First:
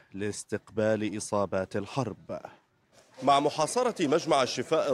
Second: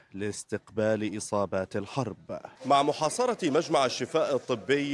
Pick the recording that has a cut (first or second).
second